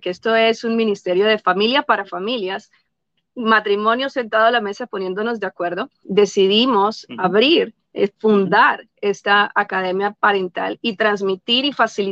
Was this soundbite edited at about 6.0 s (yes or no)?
yes